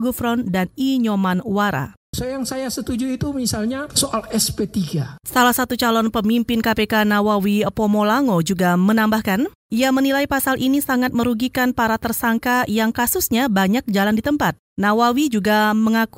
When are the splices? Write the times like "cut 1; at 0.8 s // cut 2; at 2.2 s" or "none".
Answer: cut 1; at 2.1 s